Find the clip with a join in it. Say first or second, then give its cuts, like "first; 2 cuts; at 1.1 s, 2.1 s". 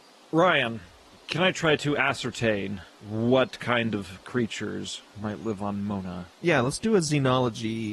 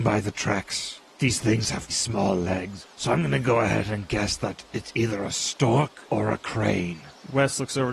second; 1 cut; at 1.9 s